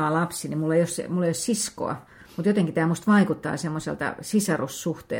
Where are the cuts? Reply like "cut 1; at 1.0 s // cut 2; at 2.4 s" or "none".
none